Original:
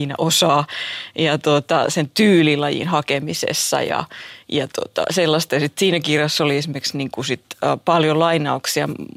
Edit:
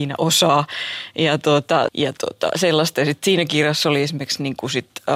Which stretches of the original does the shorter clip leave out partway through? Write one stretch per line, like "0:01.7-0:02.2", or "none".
0:01.9-0:04.4